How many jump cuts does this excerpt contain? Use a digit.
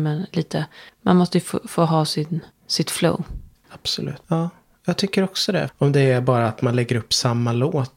2